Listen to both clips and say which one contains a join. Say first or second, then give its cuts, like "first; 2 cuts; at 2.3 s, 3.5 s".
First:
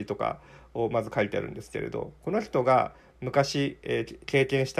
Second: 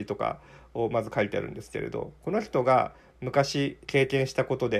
second; 1 cut; at 3.8 s